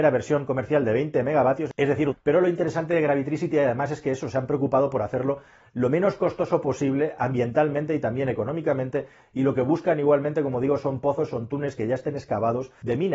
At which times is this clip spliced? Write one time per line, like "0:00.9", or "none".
0:02.1